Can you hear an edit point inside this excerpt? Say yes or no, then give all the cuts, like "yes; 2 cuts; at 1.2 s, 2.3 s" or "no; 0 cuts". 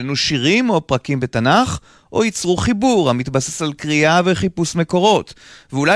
no; 0 cuts